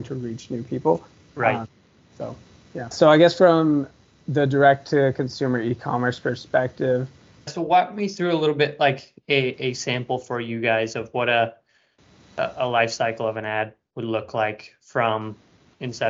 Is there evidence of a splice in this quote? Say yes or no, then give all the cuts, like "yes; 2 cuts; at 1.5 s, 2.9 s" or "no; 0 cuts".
yes; 2 cuts; at 2.9 s, 7.5 s